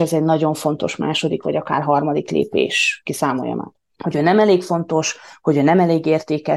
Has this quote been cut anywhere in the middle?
yes; 1 cut; at 4.0 s

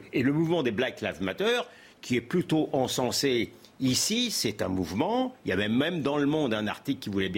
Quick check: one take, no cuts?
yes; 0 cuts

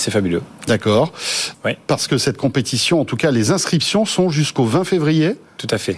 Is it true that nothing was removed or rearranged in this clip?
no; 1 cut; at 1.5 s

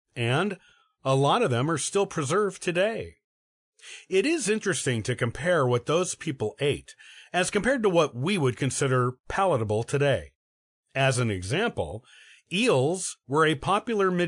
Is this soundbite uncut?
yes; 0 cuts

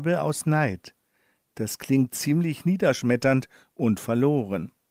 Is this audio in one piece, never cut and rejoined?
yes; 0 cuts

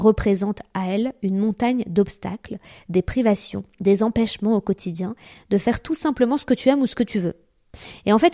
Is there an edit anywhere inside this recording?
no; 0 cuts

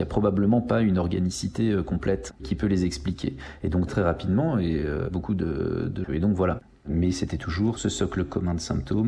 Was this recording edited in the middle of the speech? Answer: yes; 2 cuts; at 3.9 s, 6.0 s

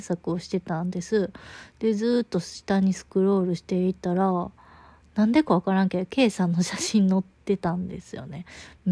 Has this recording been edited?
no; 0 cuts

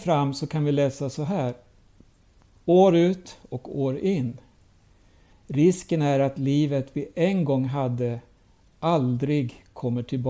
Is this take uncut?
no; 2 cuts; at 2.6 s, 5.3 s

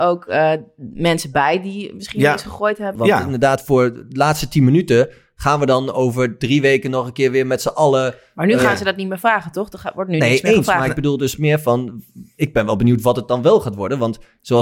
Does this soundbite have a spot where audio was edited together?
yes; 1 cut; at 3.0 s

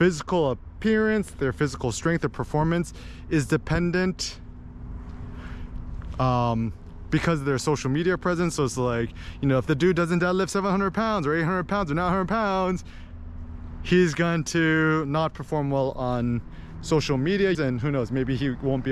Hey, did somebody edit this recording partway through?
yes; 1 cut; at 17.5 s

